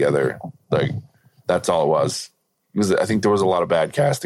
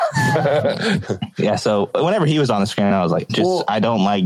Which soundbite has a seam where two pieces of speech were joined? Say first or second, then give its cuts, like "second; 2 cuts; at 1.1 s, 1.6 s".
second; 1 cut; at 3.3 s